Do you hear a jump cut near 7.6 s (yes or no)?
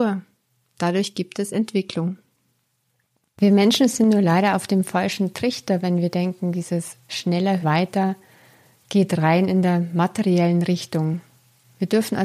yes